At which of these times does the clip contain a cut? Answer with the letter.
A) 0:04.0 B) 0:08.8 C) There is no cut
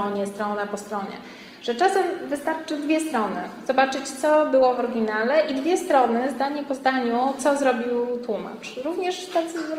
C